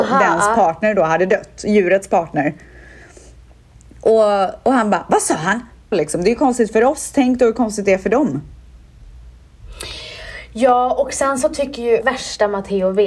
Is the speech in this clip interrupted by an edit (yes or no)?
yes